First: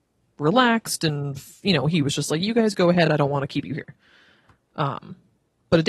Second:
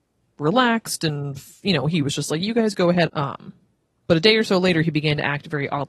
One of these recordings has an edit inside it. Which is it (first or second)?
second